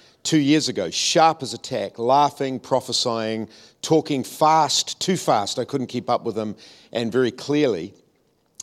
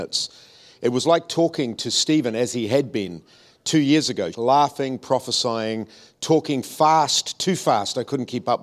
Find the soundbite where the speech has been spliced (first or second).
second